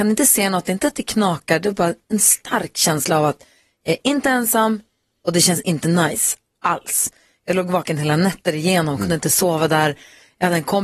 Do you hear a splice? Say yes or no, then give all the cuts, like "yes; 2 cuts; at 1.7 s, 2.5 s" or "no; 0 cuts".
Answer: no; 0 cuts